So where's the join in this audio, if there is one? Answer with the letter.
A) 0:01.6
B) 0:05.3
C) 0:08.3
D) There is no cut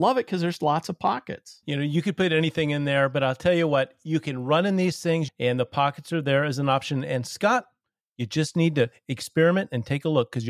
B